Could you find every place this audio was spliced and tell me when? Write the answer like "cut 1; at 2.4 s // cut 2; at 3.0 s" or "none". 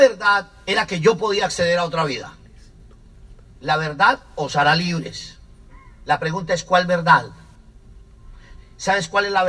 cut 1; at 3.4 s // cut 2; at 8.6 s